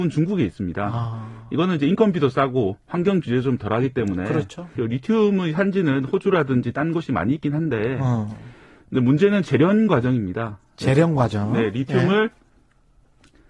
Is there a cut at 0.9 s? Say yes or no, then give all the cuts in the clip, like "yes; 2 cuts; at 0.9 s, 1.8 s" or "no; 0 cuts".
no; 1 cut; at 4.8 s